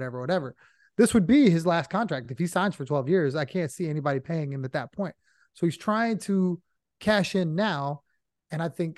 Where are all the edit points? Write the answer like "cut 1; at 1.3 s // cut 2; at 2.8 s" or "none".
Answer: none